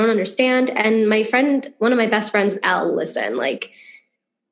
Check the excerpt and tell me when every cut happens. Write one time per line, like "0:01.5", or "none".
0:02.6

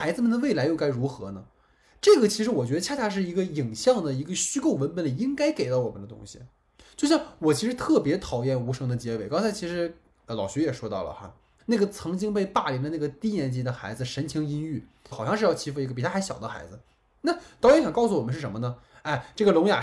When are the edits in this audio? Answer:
0:11.6
0:15.1

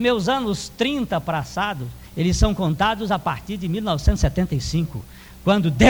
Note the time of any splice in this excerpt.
0:02.1

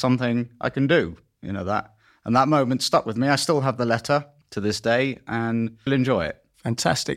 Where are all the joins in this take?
0:04.4
0:05.9

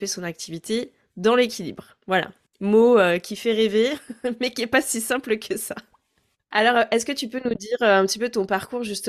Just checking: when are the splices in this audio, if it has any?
none

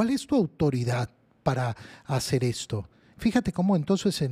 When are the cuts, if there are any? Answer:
0:03.1

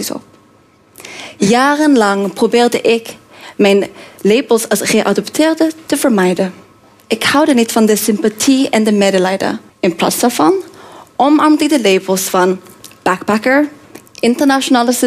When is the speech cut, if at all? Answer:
0:09.7

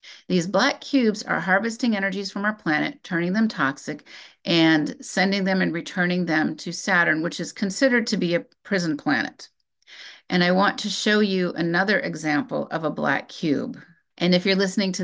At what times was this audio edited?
none

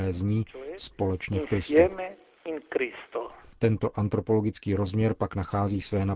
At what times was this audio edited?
0:03.6

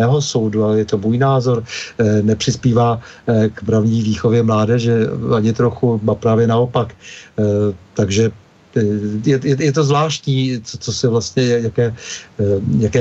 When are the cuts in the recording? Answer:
0:09.2

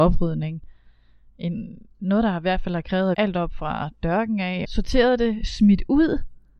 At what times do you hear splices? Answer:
0:03.1
0:04.6

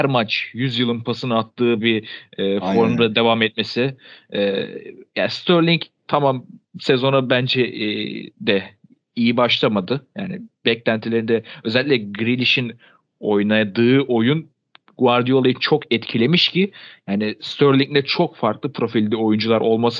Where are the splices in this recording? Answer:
none

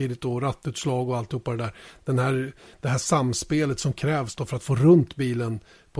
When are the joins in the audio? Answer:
none

